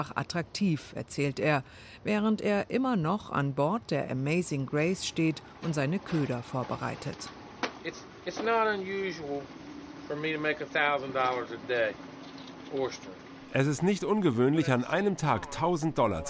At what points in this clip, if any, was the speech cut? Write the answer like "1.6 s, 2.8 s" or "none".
none